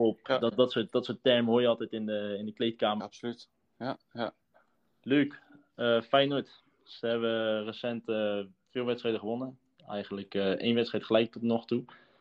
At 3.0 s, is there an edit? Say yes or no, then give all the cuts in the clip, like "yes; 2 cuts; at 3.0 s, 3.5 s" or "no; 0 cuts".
yes; 1 cut; at 3.0 s